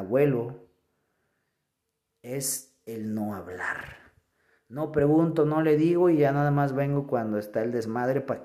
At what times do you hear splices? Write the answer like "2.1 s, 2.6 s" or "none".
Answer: none